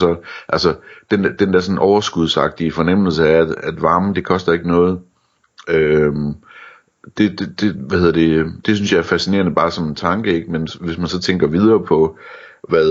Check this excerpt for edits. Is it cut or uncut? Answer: uncut